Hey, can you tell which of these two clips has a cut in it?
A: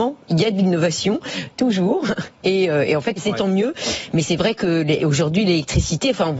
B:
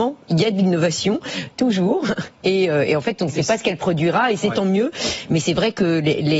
A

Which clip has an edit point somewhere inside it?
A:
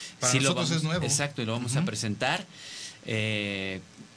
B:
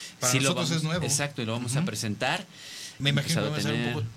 B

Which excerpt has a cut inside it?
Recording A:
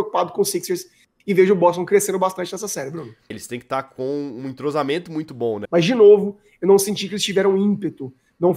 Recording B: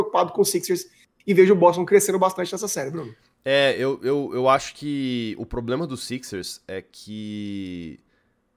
A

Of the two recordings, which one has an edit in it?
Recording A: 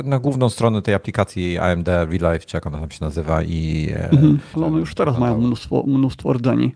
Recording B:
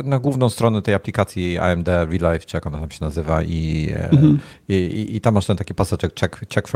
A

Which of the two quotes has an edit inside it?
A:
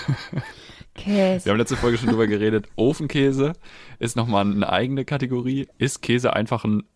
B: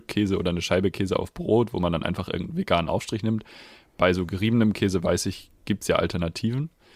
A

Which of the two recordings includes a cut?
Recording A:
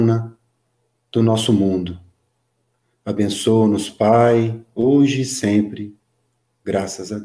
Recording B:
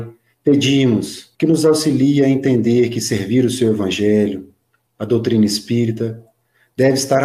B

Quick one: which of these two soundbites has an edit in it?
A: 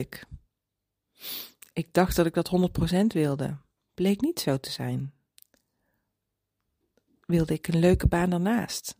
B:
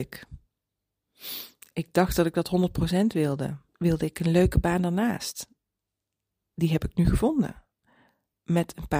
B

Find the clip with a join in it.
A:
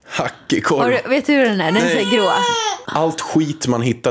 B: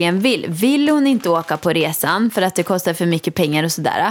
A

